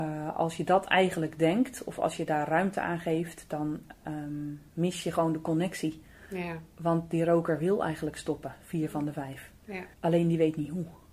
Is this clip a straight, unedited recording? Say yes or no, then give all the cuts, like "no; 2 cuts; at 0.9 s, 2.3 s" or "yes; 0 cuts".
no; 1 cut; at 9.9 s